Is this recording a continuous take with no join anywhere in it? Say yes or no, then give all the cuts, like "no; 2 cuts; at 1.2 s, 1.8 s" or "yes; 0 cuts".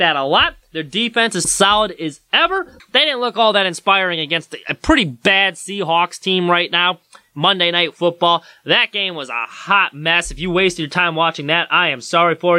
no; 2 cuts; at 1.4 s, 2.8 s